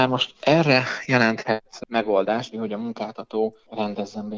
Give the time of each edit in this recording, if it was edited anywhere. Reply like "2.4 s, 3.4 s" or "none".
2.5 s